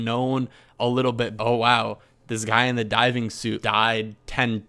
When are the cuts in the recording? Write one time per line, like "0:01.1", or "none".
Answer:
0:01.4
0:03.6